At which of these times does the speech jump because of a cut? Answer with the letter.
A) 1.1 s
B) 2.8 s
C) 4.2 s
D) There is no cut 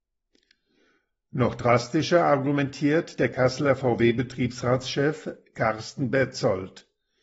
D